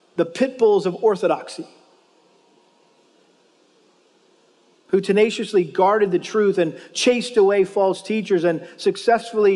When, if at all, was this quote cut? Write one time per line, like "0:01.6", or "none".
none